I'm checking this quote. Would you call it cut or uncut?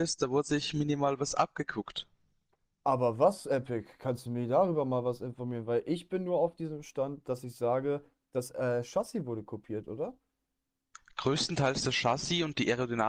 uncut